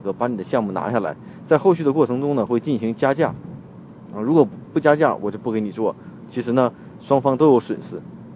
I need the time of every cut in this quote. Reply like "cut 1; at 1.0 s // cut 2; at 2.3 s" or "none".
none